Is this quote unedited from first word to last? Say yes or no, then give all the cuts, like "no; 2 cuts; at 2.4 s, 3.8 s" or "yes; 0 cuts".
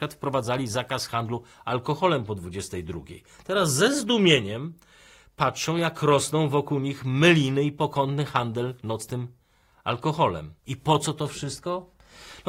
no; 1 cut; at 10.6 s